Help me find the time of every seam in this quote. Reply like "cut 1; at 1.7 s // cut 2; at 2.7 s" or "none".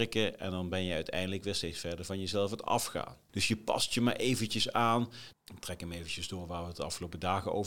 cut 1; at 3.3 s // cut 2; at 5.3 s